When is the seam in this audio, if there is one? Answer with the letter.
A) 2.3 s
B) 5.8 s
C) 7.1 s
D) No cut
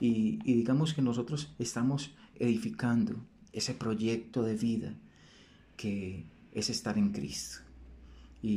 A